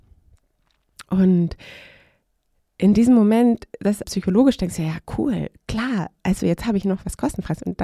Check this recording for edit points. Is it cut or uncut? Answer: cut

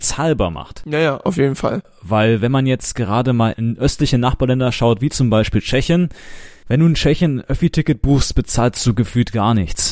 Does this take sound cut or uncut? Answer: uncut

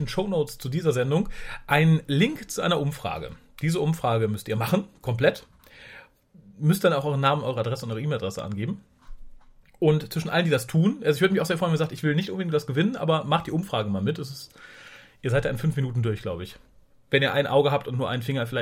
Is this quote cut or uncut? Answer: uncut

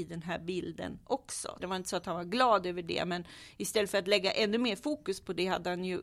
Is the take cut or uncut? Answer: cut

